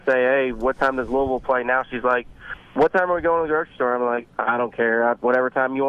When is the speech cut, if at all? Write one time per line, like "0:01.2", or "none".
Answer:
none